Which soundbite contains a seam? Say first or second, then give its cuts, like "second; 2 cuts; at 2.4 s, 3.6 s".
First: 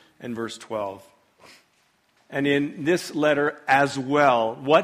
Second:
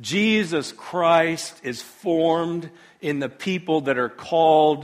first; 1 cut; at 2.2 s